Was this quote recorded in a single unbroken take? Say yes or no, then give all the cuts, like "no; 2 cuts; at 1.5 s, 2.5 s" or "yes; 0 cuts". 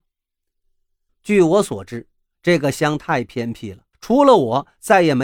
no; 2 cuts; at 1.1 s, 3.9 s